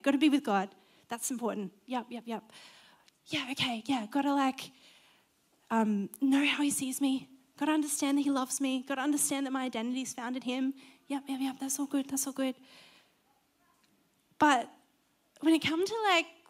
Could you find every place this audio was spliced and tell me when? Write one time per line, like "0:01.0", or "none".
none